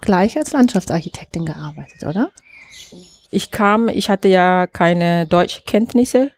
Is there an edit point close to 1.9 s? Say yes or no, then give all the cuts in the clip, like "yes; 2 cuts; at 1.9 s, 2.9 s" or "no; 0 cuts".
no; 1 cut; at 3.3 s